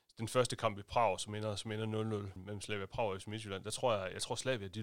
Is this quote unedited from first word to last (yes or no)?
no